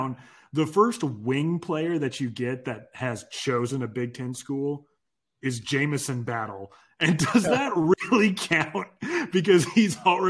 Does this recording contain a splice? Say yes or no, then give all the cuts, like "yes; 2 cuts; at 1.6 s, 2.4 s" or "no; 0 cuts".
no; 0 cuts